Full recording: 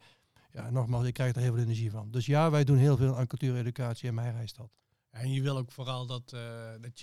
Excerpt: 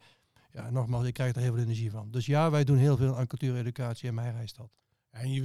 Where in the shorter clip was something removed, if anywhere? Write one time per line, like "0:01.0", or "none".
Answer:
none